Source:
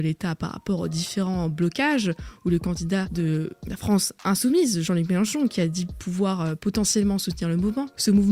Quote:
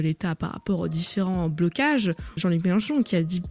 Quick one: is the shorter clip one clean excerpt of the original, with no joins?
no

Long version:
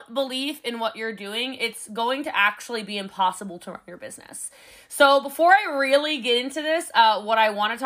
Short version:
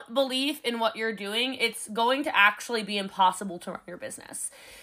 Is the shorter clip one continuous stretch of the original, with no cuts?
yes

